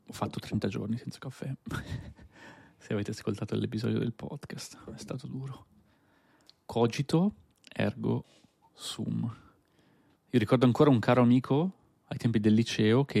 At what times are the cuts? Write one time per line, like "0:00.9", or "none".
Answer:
0:04.9
0:10.1